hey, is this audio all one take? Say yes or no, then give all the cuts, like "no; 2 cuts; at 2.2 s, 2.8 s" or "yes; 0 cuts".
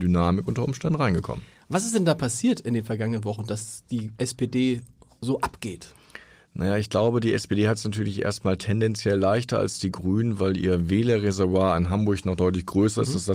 yes; 0 cuts